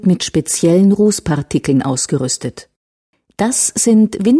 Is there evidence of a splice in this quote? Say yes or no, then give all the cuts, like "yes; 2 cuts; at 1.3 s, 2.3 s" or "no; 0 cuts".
no; 0 cuts